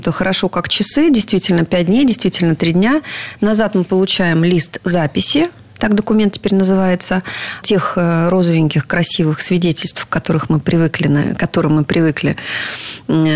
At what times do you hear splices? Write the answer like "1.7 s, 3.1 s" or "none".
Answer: 7.6 s